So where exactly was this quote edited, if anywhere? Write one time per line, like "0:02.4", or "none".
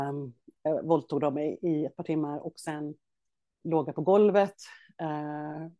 0:03.6